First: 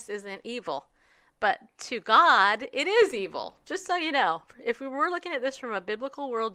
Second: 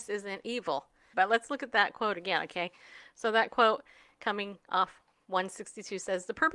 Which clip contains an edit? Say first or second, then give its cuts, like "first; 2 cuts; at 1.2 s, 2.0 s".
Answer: second; 1 cut; at 1.1 s